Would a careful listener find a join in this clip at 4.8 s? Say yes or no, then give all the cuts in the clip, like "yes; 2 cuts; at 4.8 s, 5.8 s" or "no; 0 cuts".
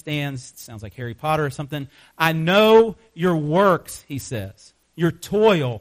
yes; 1 cut; at 4.8 s